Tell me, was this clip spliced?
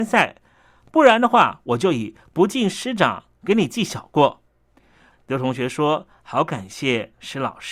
yes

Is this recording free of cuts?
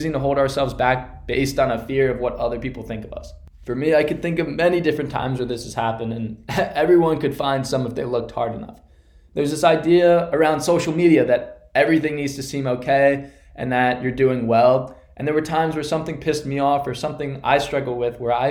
yes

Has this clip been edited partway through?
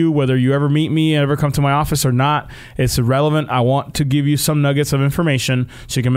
no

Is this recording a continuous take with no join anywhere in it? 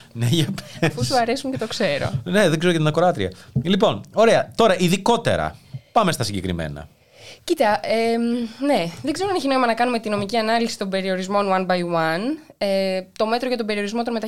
yes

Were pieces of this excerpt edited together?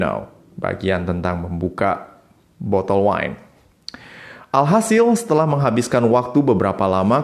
no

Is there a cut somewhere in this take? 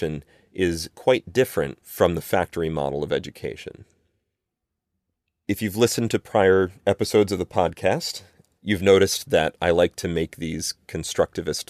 no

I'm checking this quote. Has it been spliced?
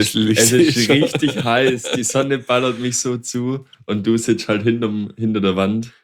no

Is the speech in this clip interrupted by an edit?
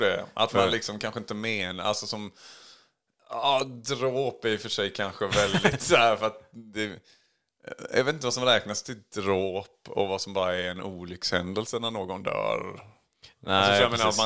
no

